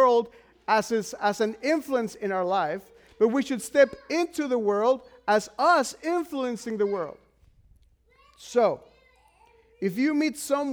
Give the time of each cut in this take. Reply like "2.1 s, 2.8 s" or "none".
none